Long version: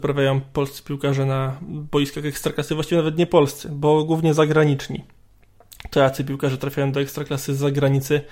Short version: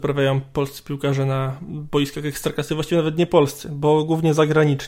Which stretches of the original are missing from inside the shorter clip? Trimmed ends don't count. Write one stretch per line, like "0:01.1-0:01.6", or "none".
none